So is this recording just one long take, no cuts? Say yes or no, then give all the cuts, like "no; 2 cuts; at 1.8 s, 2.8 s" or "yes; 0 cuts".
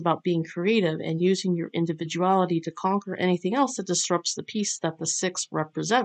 yes; 0 cuts